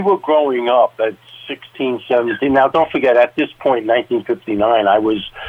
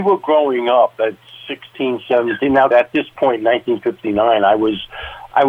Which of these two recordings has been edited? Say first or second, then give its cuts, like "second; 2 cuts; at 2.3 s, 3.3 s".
second; 1 cut; at 2.7 s